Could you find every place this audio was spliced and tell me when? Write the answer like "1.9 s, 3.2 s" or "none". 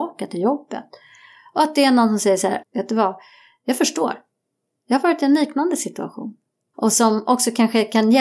2.6 s, 6.7 s